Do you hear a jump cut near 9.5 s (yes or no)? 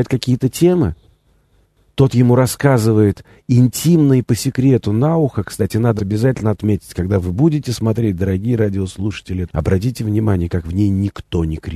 yes